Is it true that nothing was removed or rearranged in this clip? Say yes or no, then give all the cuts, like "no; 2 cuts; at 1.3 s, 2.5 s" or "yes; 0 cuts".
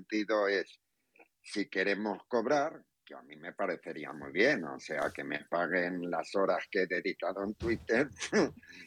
yes; 0 cuts